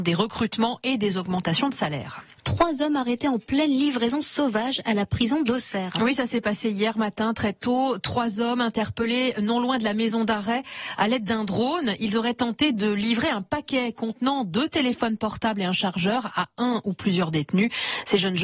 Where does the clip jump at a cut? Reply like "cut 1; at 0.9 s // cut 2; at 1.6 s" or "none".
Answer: none